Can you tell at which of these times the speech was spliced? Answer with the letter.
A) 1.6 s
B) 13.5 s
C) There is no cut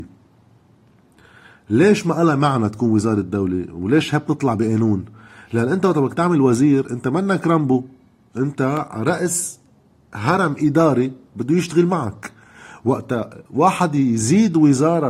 B